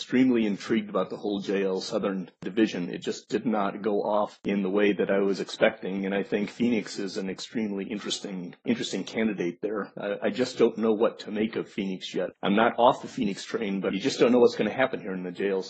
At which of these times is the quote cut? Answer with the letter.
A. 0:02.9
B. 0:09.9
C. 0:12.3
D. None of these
C